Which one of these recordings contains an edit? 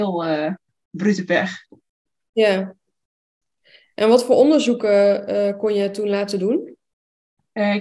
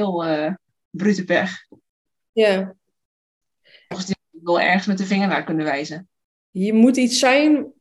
second; 2 cuts; at 3.9 s, 6.4 s

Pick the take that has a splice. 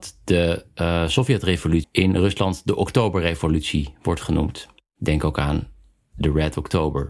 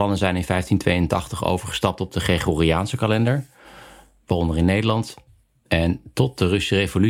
first; 1 cut; at 1.8 s

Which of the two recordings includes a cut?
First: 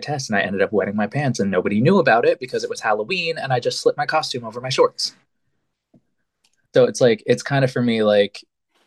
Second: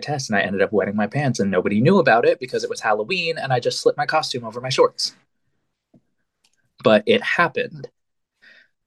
first; 1 cut; at 6.7 s

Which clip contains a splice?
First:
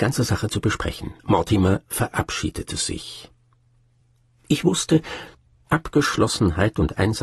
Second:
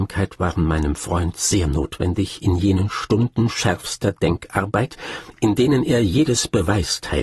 first; 1 cut; at 1.2 s

